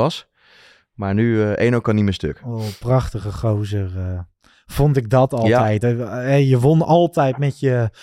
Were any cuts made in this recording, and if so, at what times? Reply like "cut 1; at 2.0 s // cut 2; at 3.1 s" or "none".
none